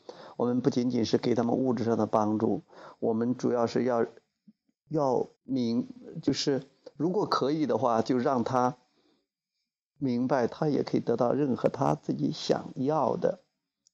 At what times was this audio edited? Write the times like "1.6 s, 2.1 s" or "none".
5.3 s, 10.5 s